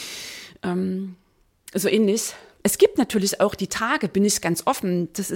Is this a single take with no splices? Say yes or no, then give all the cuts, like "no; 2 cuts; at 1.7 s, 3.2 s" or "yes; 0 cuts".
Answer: no; 1 cut; at 2.6 s